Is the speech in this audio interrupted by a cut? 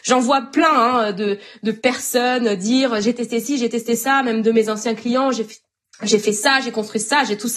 no; 0 cuts

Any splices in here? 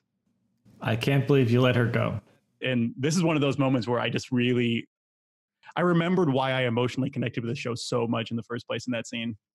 yes; 1 cut; at 2.6 s

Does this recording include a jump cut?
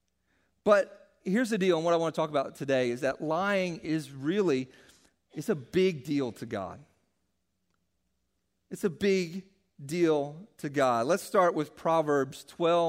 no; 0 cuts

